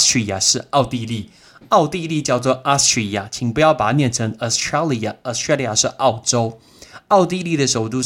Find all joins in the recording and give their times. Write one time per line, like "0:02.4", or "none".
none